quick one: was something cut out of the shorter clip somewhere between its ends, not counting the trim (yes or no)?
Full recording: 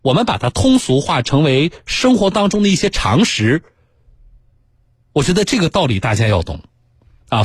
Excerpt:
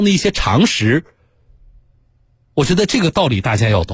no